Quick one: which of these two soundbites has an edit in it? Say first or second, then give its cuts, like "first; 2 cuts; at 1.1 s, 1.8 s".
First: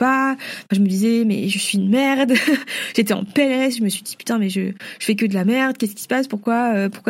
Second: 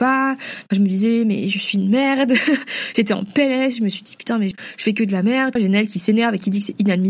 second; 2 cuts; at 4.5 s, 5.6 s